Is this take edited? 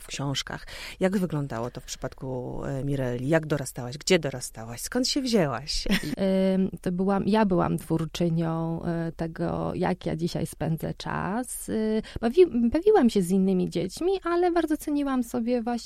yes; 1 cut; at 6.1 s

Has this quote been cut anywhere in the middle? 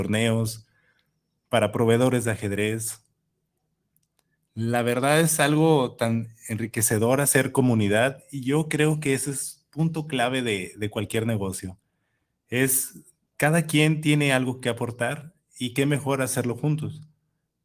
no; 0 cuts

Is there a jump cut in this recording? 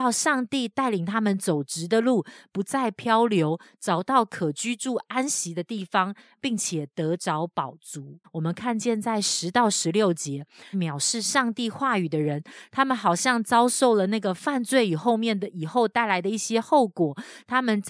yes; 2 cuts; at 8.2 s, 10.7 s

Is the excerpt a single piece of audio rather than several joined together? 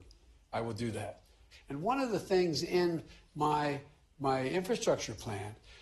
no; 1 cut; at 1.5 s

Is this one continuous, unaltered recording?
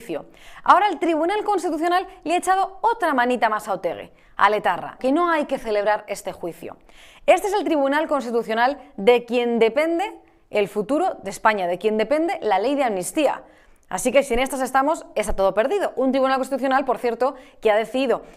no; 1 cut; at 5.0 s

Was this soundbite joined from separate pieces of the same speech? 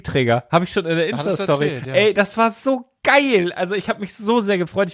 no; 0 cuts

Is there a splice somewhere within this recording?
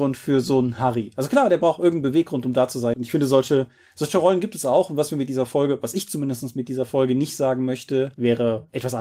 yes; 1 cut; at 2.9 s

